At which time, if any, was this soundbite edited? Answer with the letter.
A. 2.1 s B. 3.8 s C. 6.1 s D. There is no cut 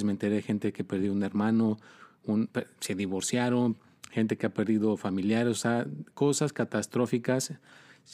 C